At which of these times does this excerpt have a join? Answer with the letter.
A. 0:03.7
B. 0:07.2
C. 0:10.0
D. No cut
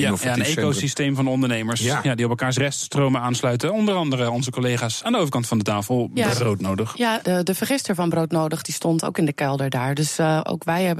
B